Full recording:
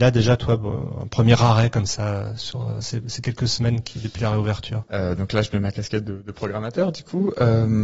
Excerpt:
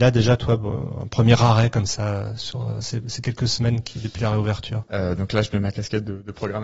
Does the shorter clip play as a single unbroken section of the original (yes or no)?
yes